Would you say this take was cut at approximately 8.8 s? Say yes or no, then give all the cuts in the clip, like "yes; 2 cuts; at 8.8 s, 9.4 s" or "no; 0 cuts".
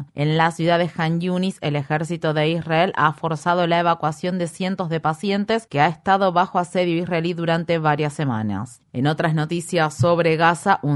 yes; 2 cuts; at 5.7 s, 8.8 s